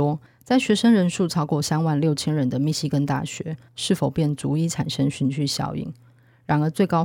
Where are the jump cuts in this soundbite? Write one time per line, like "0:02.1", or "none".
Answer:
0:03.7